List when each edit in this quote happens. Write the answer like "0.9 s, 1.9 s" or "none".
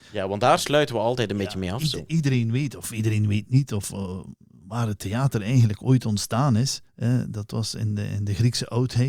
6.9 s